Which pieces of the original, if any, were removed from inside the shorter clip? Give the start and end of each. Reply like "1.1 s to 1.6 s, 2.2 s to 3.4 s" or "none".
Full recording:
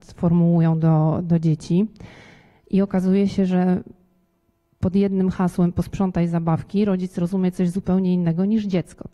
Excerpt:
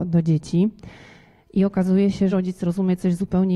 3.5 s to 6.8 s